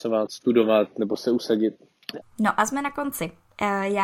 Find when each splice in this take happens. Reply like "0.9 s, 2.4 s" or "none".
2.2 s